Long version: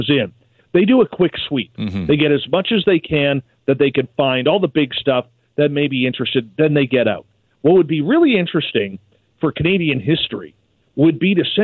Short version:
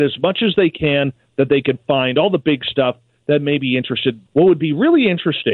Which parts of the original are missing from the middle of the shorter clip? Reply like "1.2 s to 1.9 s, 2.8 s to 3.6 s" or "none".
6.6 s to 7.5 s